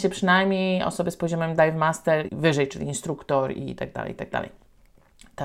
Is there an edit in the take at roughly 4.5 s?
no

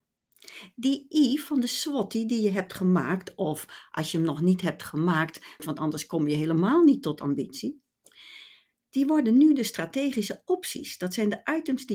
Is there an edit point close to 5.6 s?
yes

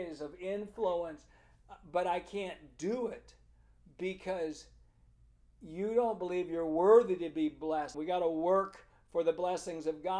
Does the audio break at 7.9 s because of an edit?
yes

